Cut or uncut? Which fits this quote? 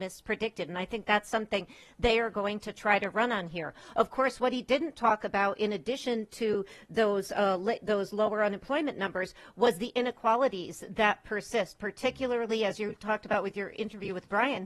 uncut